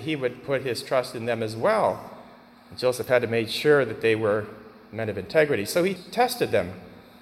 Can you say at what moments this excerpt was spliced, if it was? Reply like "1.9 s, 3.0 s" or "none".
none

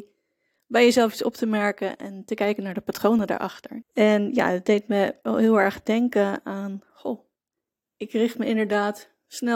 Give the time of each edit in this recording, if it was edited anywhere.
3.8 s

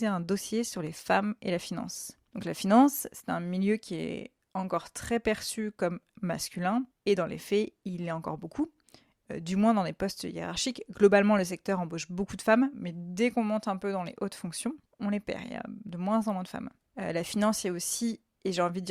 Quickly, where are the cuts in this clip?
none

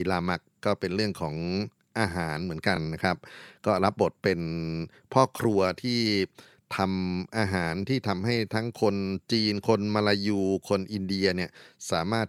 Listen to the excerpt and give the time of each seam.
none

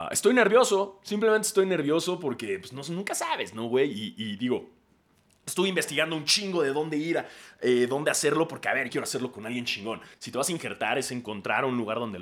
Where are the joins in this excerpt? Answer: 8.9 s, 10.1 s

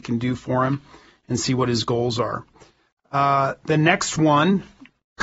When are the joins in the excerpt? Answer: none

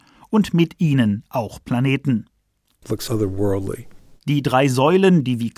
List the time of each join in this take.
2.8 s

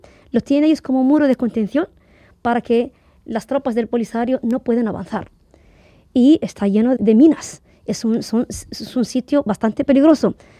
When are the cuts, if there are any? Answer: 7.0 s

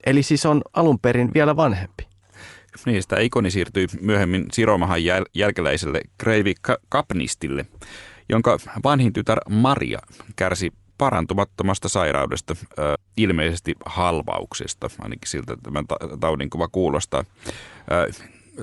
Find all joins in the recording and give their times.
13.0 s

